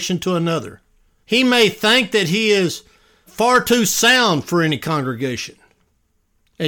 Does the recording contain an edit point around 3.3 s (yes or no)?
yes